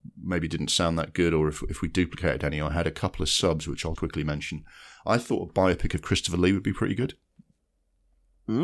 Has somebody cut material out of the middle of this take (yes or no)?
yes